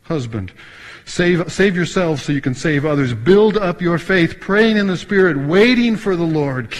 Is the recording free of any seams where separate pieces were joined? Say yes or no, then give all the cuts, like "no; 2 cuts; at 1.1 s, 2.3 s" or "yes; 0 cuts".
no; 1 cut; at 1.4 s